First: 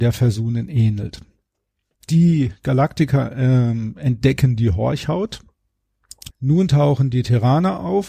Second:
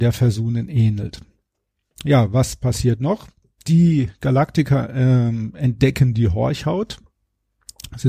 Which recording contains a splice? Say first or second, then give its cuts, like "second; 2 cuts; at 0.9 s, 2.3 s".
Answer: first; 2 cuts; at 2.0 s, 6.3 s